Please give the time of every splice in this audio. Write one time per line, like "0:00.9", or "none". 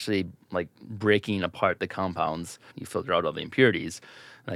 0:02.7